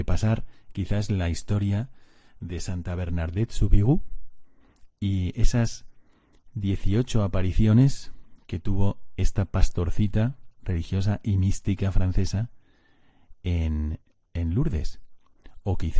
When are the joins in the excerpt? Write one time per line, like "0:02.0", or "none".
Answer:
none